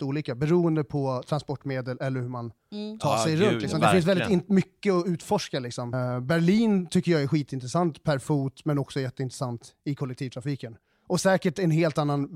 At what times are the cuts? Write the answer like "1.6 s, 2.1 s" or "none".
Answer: 5.9 s